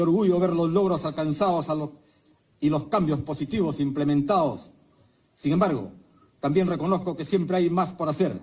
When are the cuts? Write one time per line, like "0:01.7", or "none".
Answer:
none